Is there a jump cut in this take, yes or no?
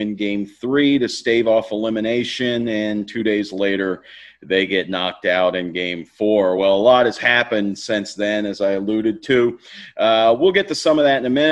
no